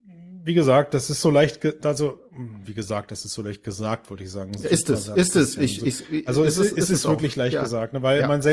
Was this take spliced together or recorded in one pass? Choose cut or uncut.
uncut